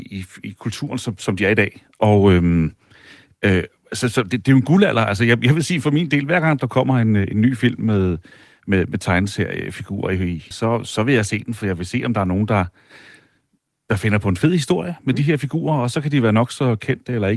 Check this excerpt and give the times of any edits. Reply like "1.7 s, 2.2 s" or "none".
10.5 s